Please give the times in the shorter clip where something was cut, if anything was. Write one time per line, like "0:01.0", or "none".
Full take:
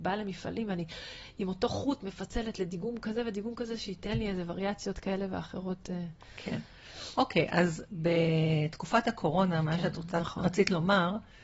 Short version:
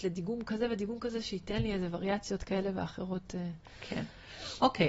none